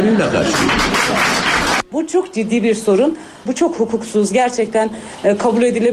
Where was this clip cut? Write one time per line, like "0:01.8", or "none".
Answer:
0:01.9
0:03.5

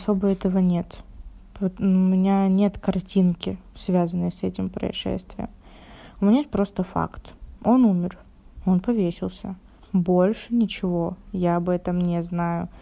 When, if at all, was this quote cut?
0:09.8

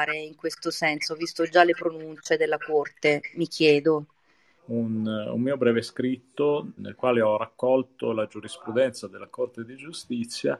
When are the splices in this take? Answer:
0:04.6
0:06.8

